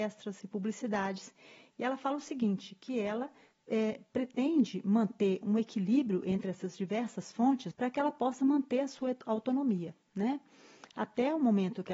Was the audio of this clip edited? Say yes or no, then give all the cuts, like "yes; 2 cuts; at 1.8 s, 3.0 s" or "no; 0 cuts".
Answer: yes; 1 cut; at 7.7 s